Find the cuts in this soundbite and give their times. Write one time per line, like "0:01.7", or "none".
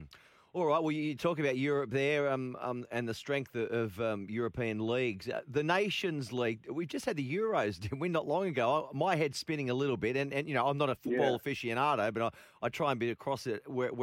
none